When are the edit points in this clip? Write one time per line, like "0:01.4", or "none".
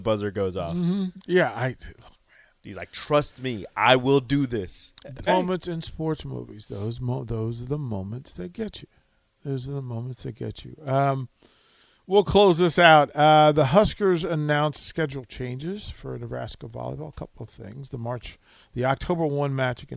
0:05.3